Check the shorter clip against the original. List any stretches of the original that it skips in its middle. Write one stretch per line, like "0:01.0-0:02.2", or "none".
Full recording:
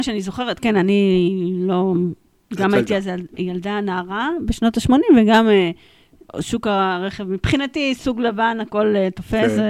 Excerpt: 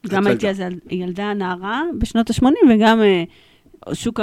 none